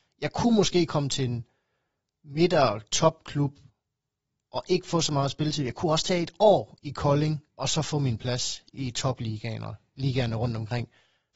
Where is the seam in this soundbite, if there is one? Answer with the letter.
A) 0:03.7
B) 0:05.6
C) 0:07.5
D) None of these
C